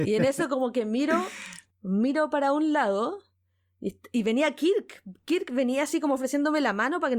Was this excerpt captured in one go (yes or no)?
yes